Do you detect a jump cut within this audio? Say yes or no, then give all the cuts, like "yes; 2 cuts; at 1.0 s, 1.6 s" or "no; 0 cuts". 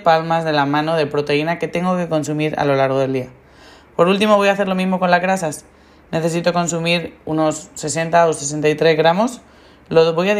no; 0 cuts